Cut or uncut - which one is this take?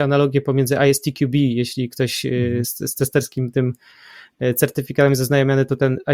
uncut